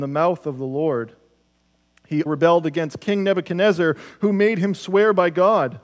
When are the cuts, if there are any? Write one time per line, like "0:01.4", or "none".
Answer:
0:02.3